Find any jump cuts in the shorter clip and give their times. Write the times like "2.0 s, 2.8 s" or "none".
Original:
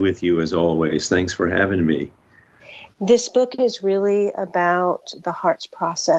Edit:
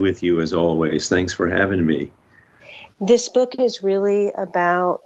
none